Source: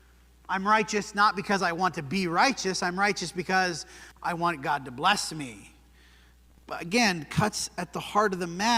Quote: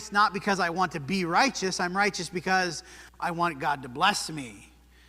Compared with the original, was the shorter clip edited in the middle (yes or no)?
no